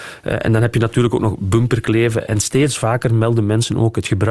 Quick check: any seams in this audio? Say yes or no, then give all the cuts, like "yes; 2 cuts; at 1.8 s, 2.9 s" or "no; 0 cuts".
no; 0 cuts